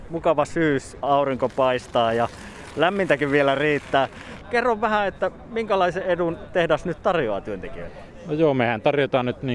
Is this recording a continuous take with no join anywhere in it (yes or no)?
no